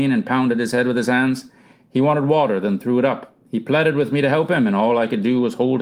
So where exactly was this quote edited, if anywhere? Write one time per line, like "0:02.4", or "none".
none